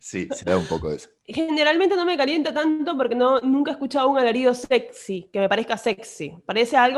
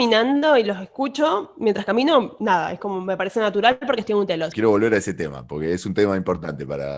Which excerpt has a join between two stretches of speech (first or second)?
second